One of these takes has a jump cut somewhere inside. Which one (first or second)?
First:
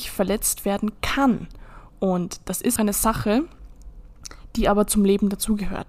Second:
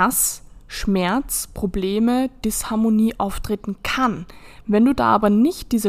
first